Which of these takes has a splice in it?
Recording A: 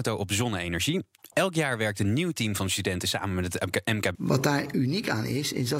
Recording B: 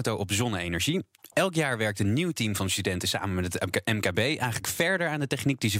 A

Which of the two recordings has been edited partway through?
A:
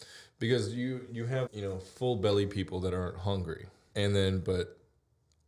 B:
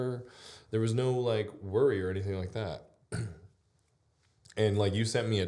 A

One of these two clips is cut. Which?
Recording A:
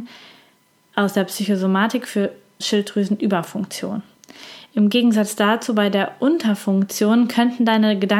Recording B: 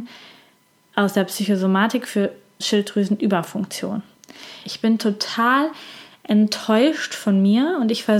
B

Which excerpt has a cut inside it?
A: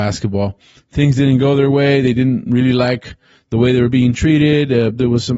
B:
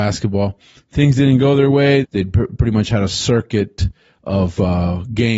B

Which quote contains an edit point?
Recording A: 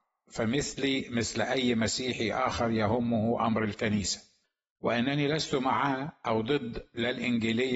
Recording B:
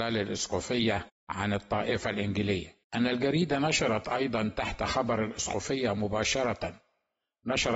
B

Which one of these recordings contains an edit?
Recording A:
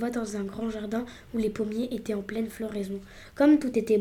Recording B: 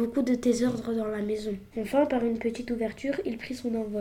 B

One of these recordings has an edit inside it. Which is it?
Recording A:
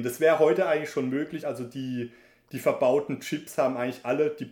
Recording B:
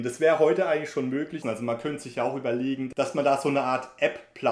B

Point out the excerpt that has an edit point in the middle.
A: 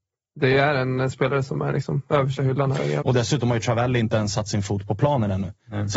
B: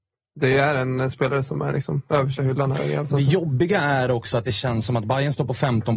A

